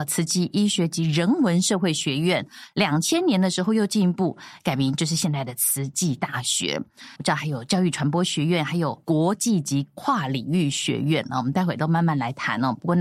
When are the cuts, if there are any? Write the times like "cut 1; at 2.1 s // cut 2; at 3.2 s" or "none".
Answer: cut 1; at 7.2 s